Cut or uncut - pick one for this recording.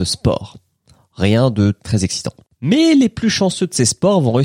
cut